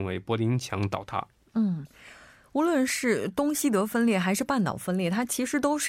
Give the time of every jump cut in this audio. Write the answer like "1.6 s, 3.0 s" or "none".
none